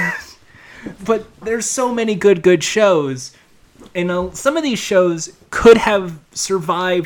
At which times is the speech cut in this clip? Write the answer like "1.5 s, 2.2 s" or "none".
1.0 s